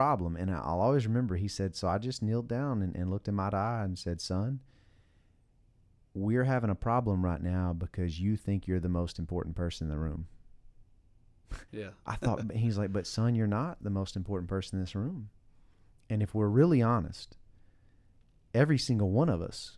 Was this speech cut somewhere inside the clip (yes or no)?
yes